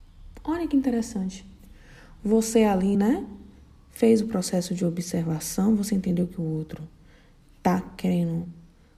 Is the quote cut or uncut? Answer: uncut